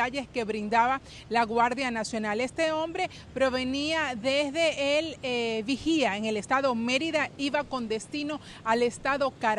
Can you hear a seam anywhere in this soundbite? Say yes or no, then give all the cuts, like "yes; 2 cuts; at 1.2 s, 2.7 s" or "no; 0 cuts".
no; 0 cuts